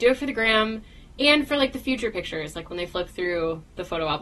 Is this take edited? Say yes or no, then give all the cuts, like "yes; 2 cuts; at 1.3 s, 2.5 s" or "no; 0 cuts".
no; 0 cuts